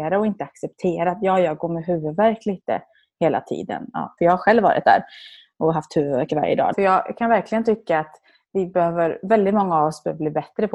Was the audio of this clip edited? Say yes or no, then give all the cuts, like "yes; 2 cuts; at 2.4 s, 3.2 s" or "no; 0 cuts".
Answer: yes; 2 cuts; at 4.2 s, 6.7 s